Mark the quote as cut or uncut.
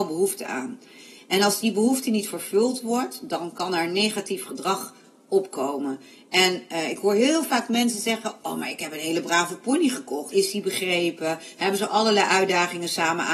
cut